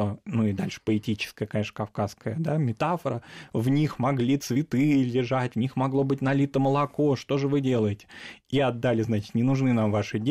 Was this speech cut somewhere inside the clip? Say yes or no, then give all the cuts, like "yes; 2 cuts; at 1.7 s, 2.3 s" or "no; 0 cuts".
no; 0 cuts